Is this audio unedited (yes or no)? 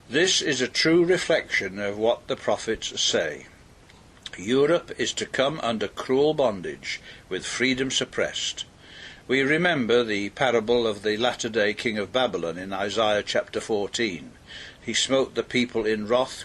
yes